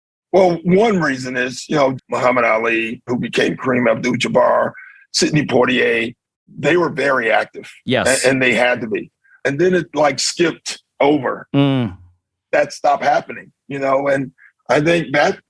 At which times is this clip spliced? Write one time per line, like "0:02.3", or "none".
0:02.0
0:03.1